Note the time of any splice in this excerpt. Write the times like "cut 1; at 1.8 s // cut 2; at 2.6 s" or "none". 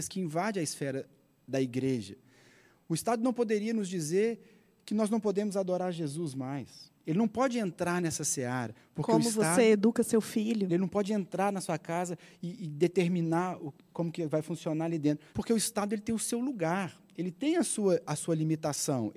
cut 1; at 10.7 s // cut 2; at 15.3 s